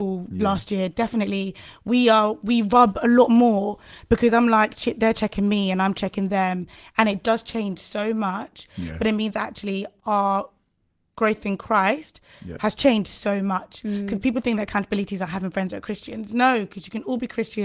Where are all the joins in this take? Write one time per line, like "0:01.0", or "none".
none

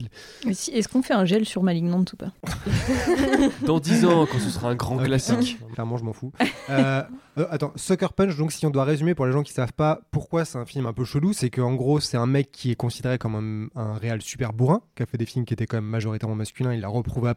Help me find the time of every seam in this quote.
0:05.7

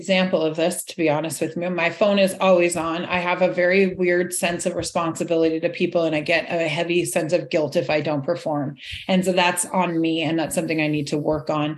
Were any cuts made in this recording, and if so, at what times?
none

